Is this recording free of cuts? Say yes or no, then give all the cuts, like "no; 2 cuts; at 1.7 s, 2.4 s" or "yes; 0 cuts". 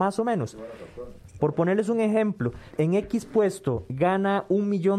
no; 2 cuts; at 1.4 s, 2.7 s